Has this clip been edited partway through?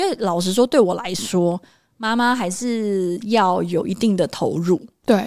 no; 0 cuts

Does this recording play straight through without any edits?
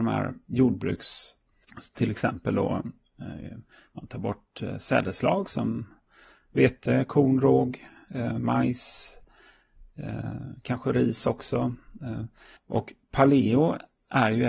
no; 2 cuts; at 1.6 s, 12.6 s

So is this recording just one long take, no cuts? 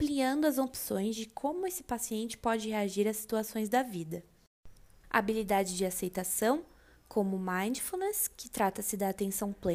no; 1 cut; at 5.0 s

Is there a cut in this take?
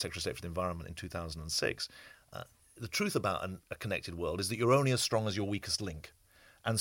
yes; 1 cut; at 2.1 s

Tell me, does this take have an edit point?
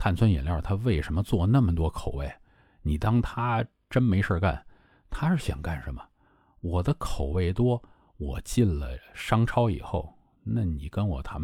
no; 0 cuts

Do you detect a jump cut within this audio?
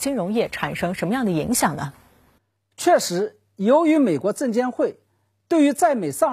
no; 0 cuts

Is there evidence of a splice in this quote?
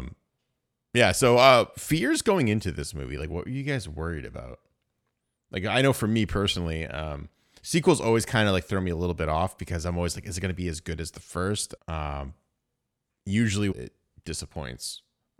yes; 2 cuts; at 11.8 s, 13.7 s

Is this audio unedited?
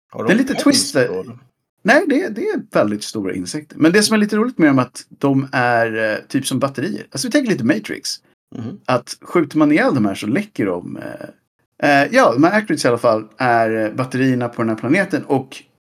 yes; 0 cuts

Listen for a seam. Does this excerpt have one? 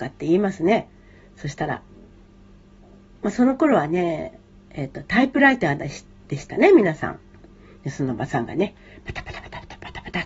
no; 0 cuts

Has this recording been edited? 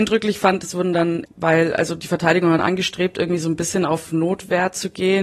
yes; 2 cuts; at 1.3 s, 2.6 s

